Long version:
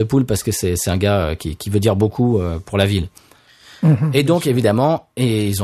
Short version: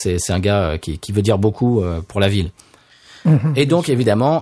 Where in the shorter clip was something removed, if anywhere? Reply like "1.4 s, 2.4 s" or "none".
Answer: none